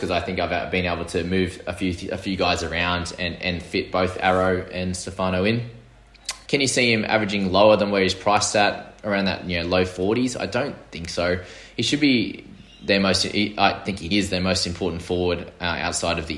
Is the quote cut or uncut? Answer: cut